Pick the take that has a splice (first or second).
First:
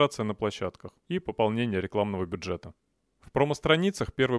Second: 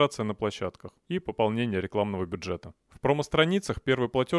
second